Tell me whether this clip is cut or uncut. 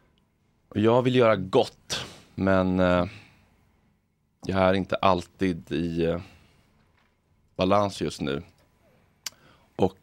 uncut